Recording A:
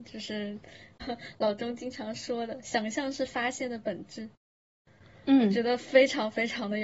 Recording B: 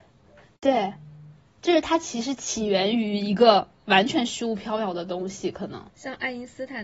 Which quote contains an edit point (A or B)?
A